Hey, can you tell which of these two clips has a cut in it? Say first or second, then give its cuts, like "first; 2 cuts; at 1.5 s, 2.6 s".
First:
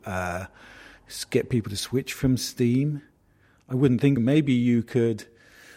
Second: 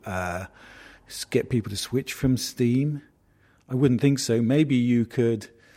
first; 1 cut; at 4.2 s